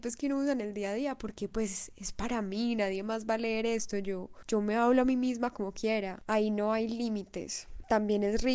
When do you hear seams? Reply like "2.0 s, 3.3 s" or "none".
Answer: none